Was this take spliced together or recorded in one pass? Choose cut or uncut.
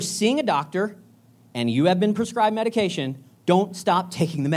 uncut